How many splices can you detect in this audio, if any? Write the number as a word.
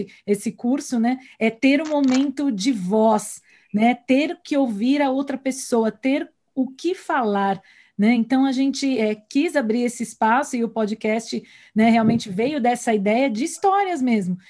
zero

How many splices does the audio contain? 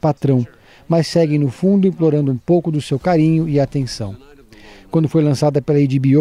zero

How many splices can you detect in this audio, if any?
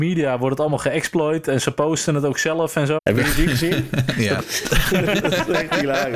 two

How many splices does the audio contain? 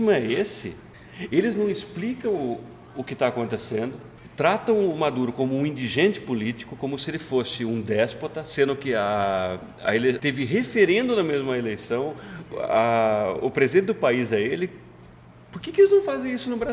two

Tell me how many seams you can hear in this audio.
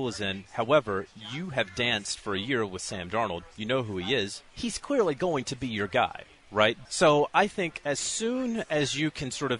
two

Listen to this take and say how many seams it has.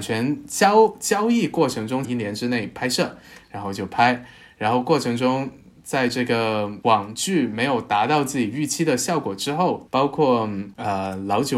two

